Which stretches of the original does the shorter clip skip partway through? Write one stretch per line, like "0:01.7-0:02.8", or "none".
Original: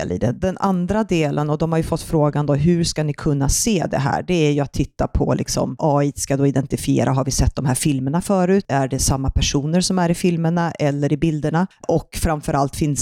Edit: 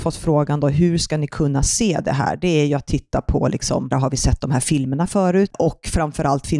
0:05.8-0:07.0
0:08.7-0:11.8

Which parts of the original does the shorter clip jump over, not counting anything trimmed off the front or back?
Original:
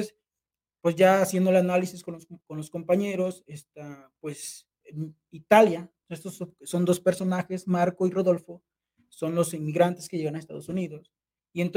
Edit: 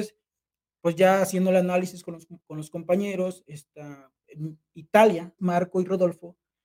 0:04.2-0:04.7
0:06.0-0:07.6

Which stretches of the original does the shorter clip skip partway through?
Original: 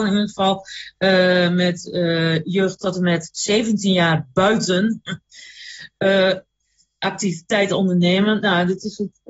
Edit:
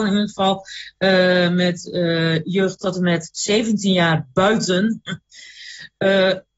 none

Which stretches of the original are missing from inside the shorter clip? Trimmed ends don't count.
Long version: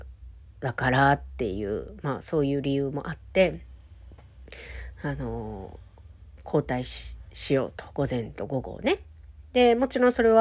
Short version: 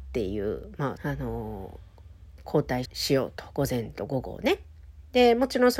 0:02.2-0:05.0
0:06.8-0:07.3

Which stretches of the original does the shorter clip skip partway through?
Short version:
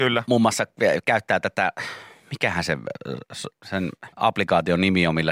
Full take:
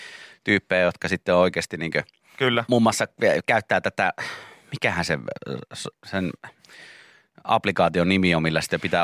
0:06.5-0:07.4

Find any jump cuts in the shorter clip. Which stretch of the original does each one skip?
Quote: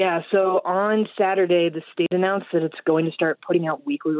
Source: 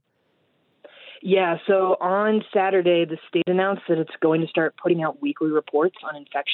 none

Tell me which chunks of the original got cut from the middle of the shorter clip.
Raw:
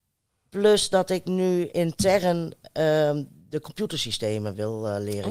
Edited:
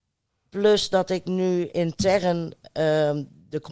none

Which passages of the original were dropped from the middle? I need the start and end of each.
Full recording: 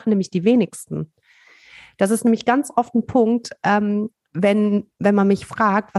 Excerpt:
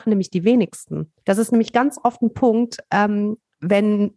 0:01.2-0:01.9

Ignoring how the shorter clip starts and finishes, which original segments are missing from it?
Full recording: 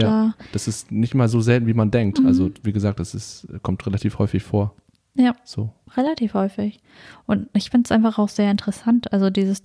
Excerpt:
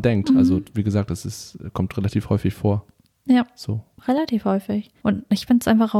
0:06.9-0:07.2

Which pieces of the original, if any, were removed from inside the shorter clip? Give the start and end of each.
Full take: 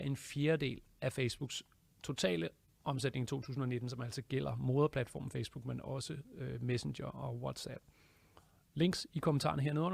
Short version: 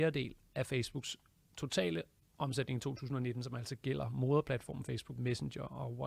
0:05.6-0:06.6

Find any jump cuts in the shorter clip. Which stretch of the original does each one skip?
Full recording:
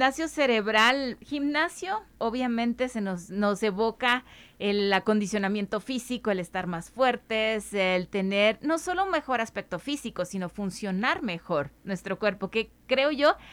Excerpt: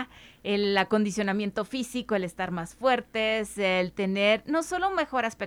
none

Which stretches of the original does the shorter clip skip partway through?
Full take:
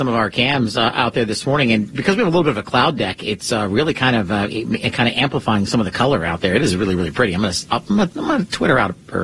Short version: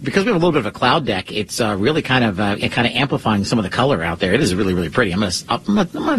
0:04.5-0:04.8

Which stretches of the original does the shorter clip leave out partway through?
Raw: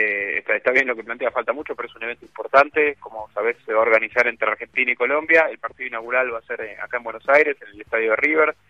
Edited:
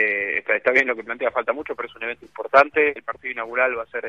0:03.0-0:05.5

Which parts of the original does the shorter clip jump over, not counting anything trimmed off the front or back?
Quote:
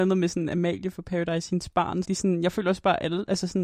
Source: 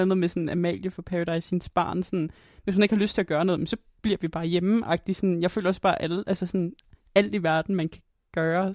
0:02.0-0:05.0

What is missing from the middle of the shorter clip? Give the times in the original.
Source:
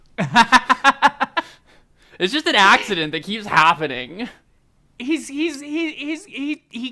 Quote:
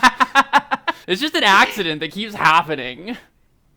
0:01.5-0:02.2

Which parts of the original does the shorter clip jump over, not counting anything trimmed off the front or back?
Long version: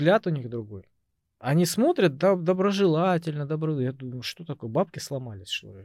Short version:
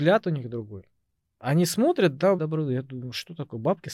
0:02.4-0:03.5

